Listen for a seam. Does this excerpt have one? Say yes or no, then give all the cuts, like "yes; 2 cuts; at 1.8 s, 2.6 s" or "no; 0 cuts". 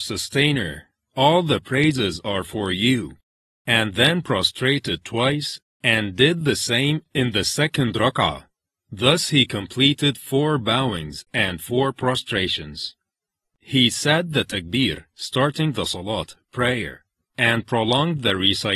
yes; 1 cut; at 13.5 s